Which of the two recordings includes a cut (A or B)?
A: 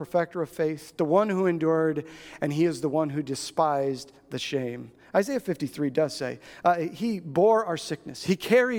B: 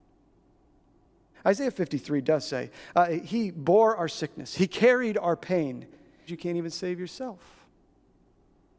B